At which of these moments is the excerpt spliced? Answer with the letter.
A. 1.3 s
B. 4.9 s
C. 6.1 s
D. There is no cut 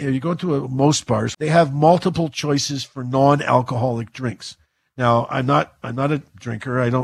A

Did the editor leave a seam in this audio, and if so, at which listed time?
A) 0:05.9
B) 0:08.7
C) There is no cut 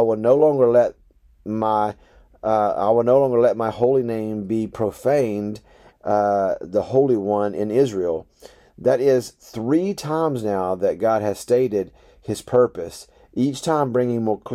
A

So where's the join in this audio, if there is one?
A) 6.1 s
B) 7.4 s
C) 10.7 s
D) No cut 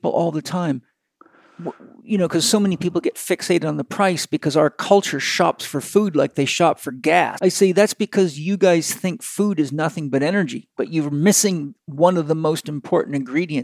B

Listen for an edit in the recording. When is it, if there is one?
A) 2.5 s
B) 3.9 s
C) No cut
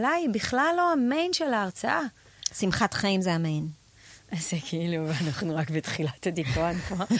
B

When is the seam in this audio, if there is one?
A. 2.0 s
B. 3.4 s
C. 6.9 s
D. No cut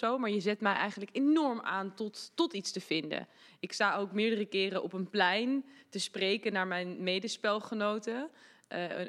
D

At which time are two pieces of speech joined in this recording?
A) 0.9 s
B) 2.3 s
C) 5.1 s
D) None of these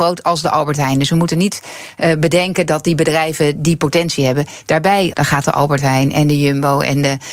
C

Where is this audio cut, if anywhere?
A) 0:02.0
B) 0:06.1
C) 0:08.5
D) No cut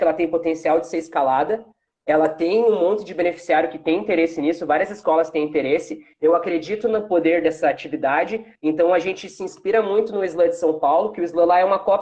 D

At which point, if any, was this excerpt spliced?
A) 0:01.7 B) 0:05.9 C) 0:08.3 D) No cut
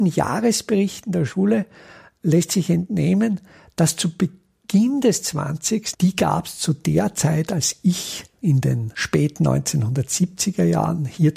B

